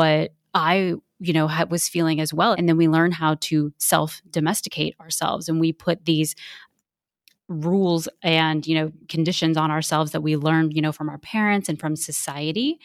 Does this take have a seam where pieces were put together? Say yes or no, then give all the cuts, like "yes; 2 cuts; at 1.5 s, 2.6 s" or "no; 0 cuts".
yes; 1 cut; at 2.5 s